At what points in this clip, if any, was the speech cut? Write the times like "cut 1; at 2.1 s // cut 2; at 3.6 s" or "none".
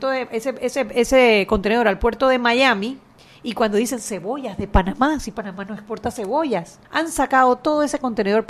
cut 1; at 6.8 s